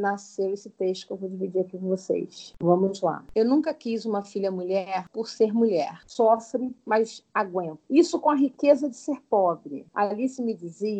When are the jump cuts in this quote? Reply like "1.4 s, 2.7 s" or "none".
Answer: 6.1 s